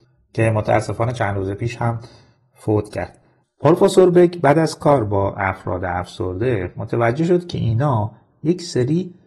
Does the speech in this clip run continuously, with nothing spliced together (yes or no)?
yes